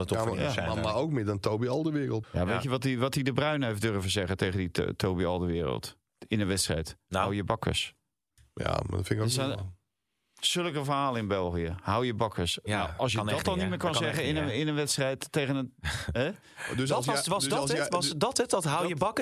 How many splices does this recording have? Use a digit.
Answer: 1